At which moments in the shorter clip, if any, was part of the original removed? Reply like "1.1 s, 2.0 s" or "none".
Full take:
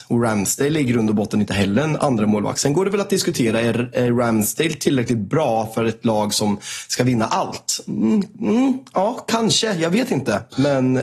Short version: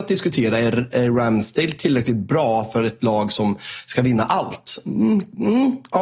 none